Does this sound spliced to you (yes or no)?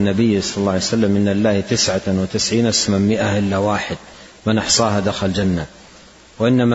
no